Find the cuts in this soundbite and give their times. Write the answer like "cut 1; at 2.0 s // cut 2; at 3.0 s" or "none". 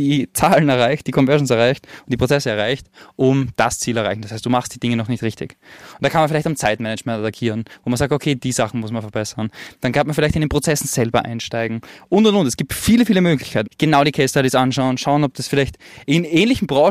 cut 1; at 13.6 s